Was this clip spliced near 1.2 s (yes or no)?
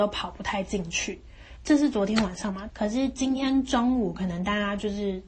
no